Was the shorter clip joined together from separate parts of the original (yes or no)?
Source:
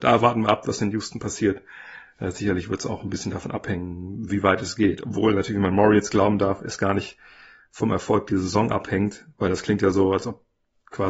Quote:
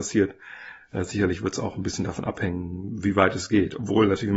no